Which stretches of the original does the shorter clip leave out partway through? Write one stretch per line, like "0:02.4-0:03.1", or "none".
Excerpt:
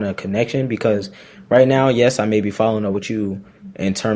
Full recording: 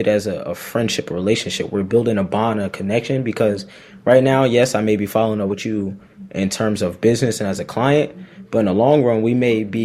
none